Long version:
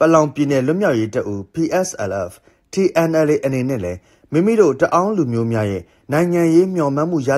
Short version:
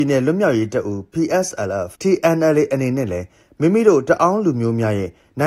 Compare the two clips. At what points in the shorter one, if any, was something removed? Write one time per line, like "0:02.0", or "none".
0:01.9